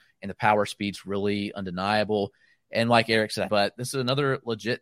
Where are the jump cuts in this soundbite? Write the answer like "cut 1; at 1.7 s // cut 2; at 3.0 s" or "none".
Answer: cut 1; at 3.5 s